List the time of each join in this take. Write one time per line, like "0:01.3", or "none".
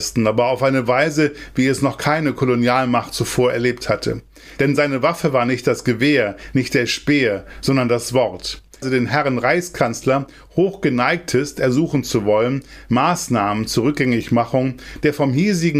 0:08.8